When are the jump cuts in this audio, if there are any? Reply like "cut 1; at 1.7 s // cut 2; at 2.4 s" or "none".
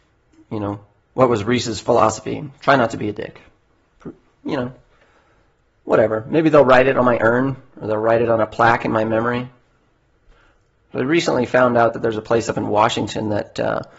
none